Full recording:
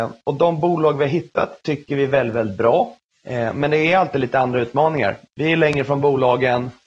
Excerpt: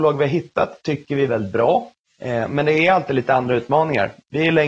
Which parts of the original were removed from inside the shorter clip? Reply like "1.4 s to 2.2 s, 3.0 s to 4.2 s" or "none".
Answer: 2.1 s to 2.3 s